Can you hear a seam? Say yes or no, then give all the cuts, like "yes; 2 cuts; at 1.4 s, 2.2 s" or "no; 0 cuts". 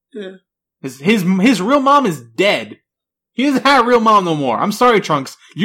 no; 0 cuts